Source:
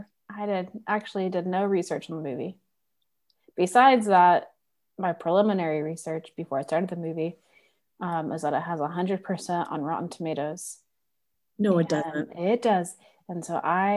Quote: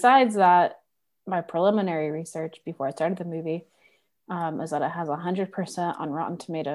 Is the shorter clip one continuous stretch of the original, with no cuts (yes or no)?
yes